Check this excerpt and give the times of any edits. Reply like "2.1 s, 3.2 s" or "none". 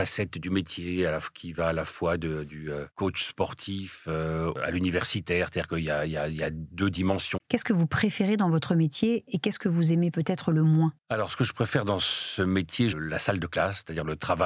7.4 s, 12.9 s